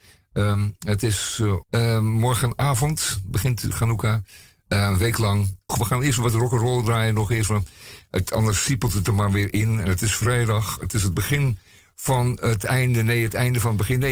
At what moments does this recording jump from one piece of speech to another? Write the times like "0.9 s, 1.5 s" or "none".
1.6 s, 5.7 s